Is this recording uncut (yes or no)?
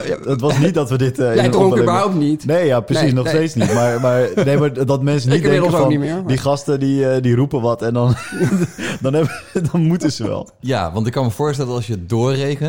yes